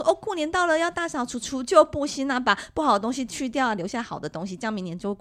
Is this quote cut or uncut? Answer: uncut